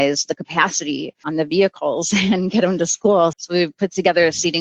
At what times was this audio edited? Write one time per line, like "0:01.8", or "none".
0:03.3